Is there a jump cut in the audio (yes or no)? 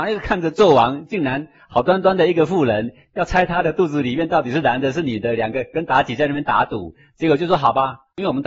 no